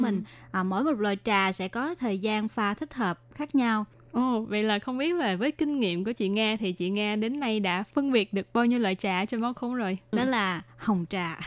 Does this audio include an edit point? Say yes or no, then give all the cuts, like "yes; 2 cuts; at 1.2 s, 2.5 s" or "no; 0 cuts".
yes; 2 cuts; at 3.9 s, 10.1 s